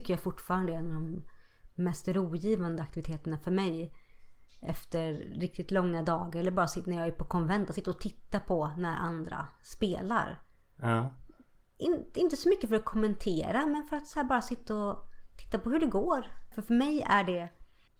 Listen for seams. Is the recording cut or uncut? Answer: cut